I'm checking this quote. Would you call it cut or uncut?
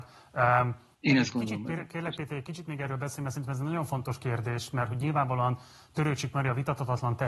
cut